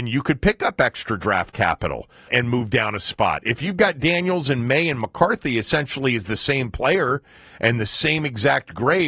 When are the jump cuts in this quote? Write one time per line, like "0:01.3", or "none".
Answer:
0:02.3